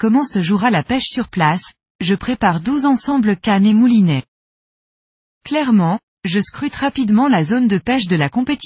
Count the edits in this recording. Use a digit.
0